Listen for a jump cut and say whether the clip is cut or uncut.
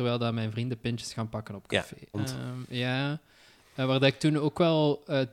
cut